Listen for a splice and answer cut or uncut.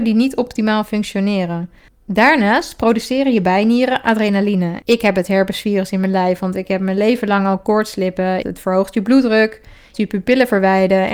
cut